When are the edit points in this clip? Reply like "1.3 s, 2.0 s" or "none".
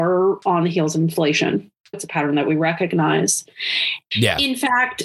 1.9 s, 4.1 s